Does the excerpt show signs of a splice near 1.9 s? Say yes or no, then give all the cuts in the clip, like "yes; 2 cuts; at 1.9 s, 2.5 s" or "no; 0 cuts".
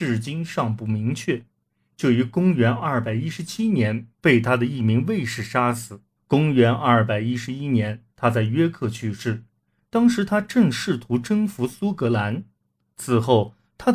yes; 2 cuts; at 1.9 s, 6.2 s